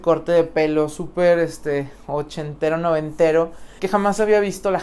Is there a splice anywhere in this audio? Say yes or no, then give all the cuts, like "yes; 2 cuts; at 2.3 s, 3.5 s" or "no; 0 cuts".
yes; 1 cut; at 3.8 s